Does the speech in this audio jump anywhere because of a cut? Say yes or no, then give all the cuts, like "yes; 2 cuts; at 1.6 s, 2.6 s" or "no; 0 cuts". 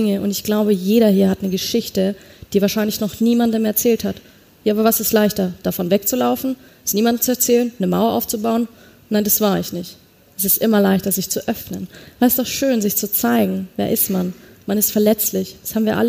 no; 0 cuts